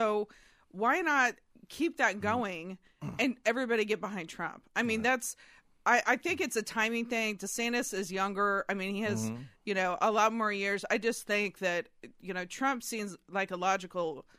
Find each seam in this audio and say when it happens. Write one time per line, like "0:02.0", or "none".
none